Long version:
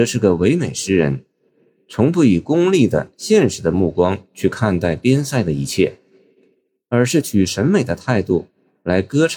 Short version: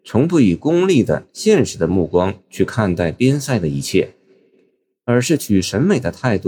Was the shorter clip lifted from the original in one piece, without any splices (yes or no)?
yes